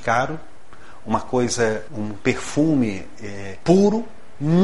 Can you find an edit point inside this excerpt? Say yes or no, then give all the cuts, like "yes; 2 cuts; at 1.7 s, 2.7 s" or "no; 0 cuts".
yes; 2 cuts; at 1.9 s, 3.6 s